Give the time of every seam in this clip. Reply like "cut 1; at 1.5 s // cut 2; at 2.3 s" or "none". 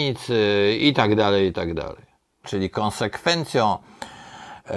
cut 1; at 2.4 s